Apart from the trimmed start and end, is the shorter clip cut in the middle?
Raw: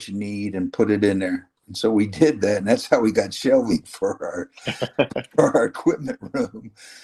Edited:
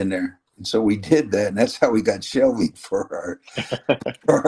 no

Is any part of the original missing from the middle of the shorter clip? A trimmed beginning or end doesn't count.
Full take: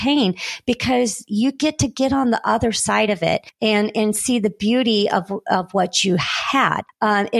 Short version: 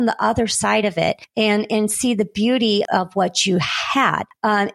yes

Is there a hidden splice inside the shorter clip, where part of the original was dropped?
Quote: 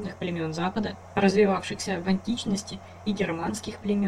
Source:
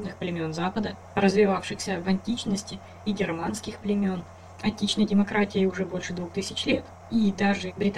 no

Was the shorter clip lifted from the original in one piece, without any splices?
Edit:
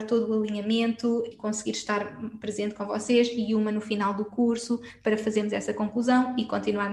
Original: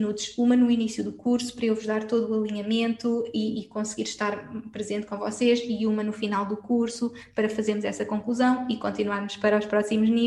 no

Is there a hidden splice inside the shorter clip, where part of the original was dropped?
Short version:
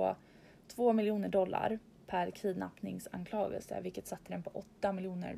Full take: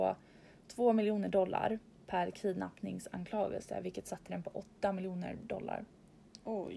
no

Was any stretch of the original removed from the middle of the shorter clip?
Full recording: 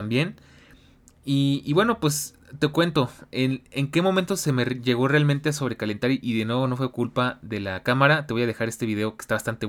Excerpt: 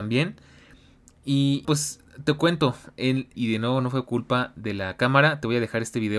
yes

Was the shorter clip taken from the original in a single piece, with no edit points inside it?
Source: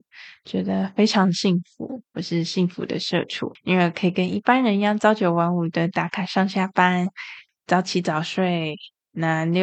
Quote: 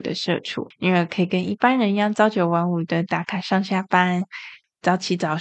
yes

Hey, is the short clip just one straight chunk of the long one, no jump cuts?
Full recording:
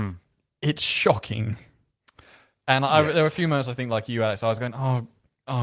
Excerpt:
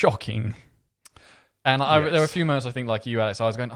yes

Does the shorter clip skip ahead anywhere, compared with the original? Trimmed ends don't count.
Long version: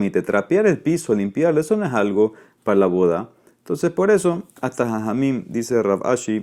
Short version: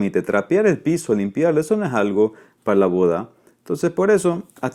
no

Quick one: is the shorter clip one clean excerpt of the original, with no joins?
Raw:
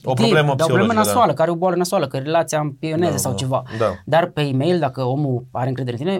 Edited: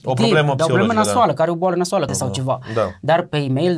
no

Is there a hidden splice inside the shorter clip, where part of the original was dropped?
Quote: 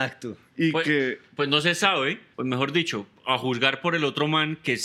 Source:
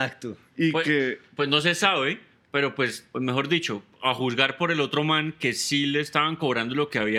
yes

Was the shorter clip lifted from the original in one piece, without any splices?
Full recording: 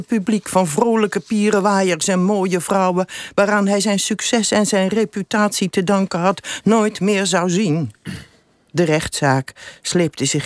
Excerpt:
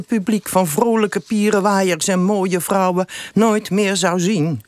no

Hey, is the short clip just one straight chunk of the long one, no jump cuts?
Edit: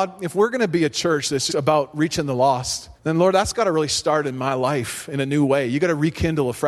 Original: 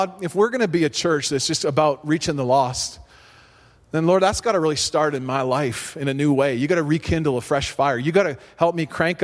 no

